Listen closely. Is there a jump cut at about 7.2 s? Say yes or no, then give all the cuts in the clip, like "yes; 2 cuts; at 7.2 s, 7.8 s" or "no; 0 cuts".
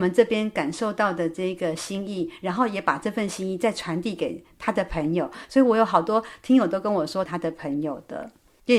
yes; 1 cut; at 7.2 s